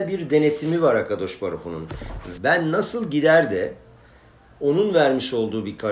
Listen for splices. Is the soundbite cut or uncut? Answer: cut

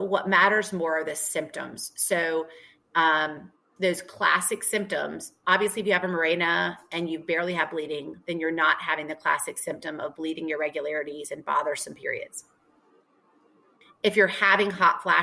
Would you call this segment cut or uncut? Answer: uncut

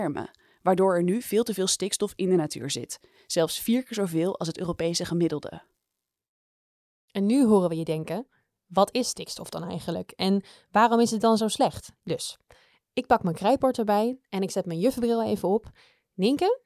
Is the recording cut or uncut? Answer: cut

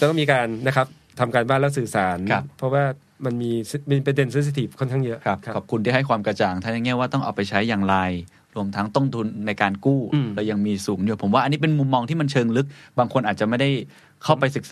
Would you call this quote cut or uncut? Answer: uncut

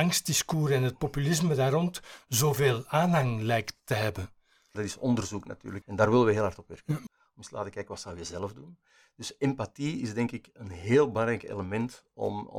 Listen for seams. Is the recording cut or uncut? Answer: cut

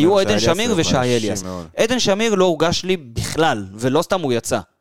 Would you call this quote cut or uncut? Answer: uncut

